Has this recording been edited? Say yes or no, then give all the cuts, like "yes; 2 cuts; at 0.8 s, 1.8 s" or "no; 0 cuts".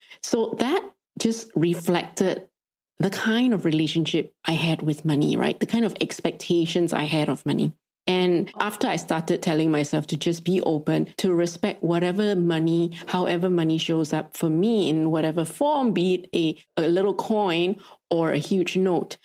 no; 0 cuts